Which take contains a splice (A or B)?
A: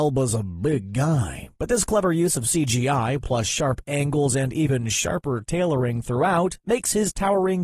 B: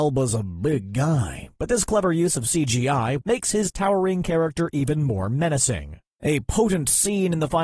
B